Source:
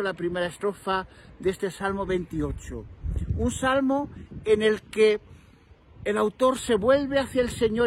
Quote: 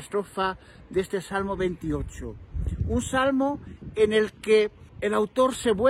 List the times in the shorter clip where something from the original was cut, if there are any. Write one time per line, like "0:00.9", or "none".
0:04.9